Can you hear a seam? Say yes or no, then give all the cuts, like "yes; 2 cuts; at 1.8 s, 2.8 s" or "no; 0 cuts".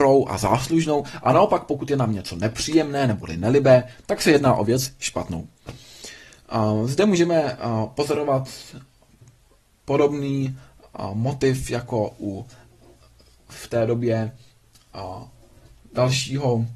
no; 0 cuts